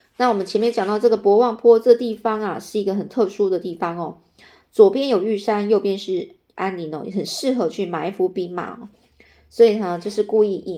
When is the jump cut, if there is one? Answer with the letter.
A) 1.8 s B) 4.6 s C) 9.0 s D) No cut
D